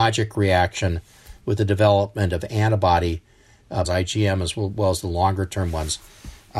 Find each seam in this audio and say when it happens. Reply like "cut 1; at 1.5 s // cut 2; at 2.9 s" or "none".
cut 1; at 3.8 s